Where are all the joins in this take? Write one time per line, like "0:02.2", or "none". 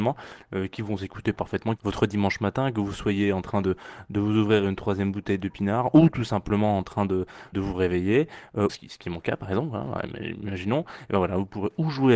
0:01.8
0:07.5
0:08.7